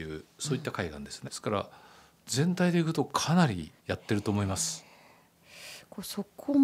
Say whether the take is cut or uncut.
cut